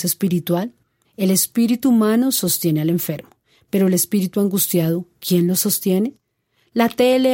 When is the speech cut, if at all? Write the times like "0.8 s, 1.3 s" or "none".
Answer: 1.0 s